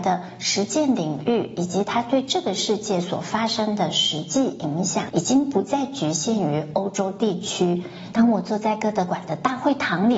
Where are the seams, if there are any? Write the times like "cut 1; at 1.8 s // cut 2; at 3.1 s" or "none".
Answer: cut 1; at 8.1 s